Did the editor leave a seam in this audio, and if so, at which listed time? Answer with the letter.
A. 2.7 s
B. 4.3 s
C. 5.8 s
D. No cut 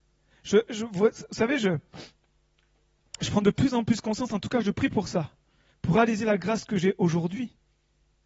D